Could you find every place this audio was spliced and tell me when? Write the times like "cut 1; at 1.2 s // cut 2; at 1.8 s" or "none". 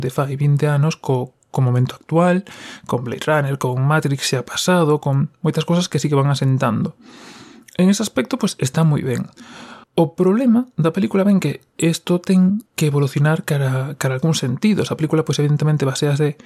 cut 1; at 9.8 s // cut 2; at 12.7 s